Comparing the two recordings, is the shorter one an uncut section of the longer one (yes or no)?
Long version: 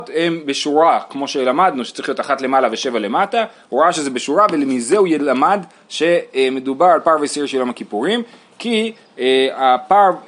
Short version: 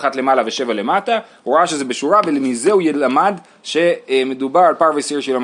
yes